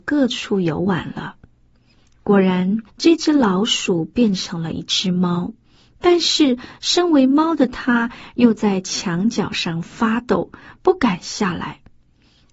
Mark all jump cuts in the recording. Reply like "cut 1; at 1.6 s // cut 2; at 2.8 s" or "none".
cut 1; at 2.9 s